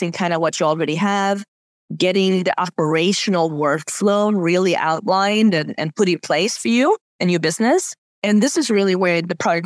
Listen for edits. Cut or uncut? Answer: cut